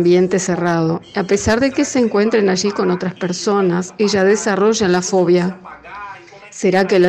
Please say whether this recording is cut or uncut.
uncut